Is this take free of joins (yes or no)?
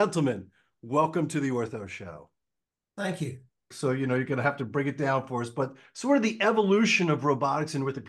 no